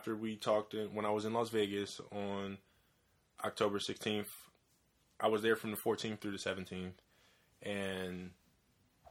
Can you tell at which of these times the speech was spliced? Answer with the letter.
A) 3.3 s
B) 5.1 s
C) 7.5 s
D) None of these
D